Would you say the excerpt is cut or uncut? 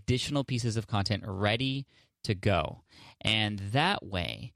uncut